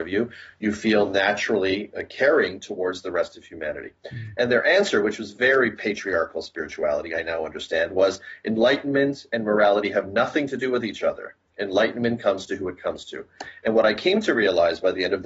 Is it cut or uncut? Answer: uncut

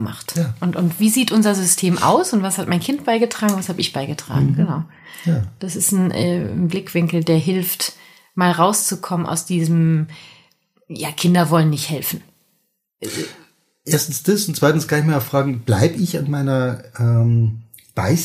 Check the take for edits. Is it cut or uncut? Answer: uncut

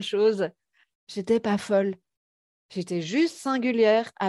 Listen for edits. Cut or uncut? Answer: cut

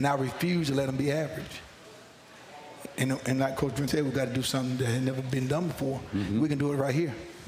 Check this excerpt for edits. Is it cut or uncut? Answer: cut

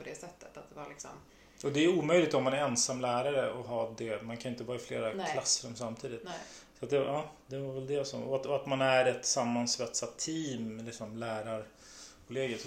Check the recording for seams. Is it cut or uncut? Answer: uncut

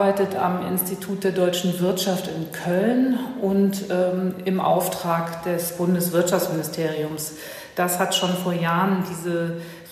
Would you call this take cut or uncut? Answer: uncut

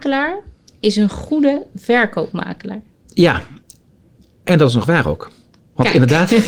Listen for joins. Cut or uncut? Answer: uncut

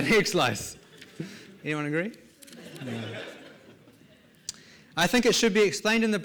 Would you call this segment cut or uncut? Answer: uncut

